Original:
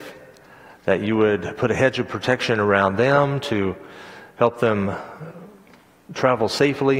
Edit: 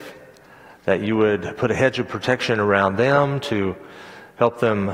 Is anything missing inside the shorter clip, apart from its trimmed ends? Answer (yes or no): no